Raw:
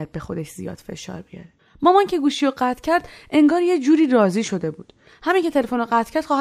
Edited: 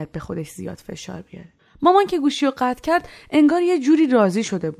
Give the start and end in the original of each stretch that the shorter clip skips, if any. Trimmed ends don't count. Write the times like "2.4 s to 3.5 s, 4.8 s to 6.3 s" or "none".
none